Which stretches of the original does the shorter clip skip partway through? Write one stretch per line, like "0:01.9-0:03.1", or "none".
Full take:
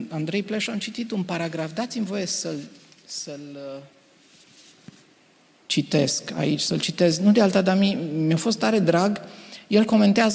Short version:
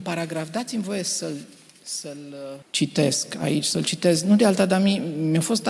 0:03.8-0:05.6